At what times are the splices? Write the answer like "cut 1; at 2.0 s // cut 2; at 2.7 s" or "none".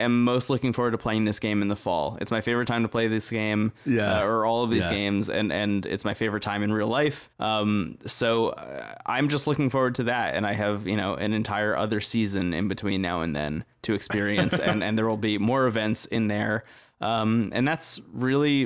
none